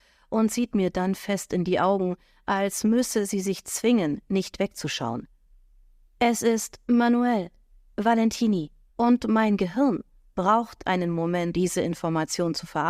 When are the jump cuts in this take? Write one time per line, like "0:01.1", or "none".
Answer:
0:06.1
0:08.9
0:11.5